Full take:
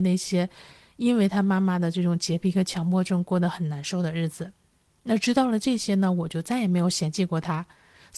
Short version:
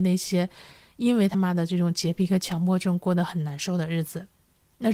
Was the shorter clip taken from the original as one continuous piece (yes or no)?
no